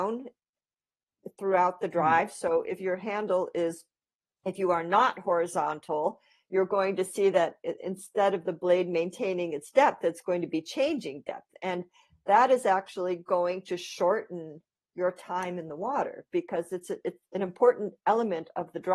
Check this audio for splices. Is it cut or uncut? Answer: uncut